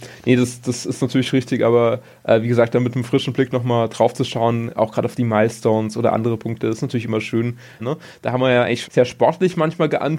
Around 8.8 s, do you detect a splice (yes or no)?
yes